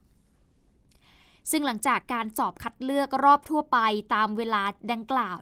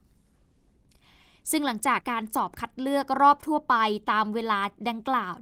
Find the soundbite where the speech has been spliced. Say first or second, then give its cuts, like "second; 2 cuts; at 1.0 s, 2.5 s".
second; 1 cut; at 2.0 s